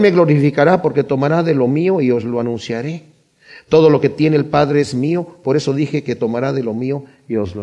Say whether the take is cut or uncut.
uncut